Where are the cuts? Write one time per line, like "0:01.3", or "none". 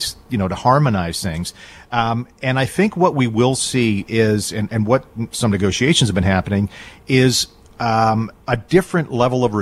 0:08.4